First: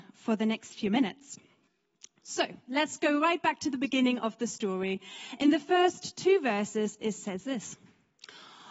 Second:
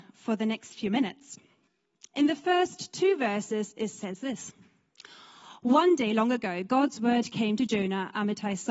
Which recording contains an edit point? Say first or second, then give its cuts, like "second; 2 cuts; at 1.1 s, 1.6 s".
second; 1 cut; at 2.1 s